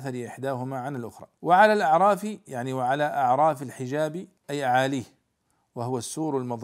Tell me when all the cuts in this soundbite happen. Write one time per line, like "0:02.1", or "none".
0:01.3
0:04.4